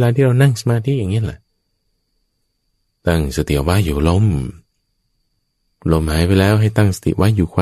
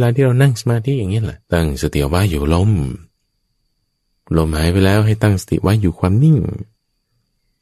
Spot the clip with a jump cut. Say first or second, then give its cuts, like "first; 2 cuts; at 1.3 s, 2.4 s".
second; 1 cut; at 1.4 s